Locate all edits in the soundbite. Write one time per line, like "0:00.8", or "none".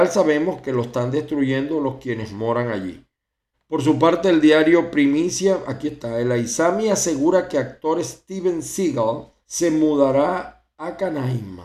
0:03.5
0:09.4